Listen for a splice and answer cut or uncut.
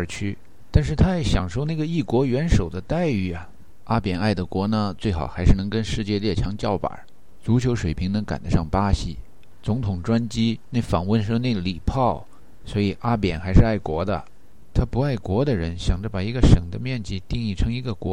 uncut